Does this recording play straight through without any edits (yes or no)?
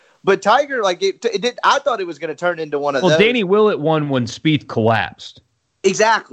yes